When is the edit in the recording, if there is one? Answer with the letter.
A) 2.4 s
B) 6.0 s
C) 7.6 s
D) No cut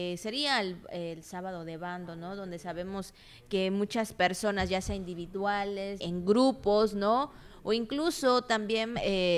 B